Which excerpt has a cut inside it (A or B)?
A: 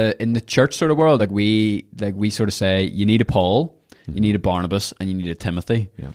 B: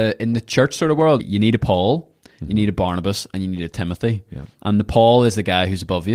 B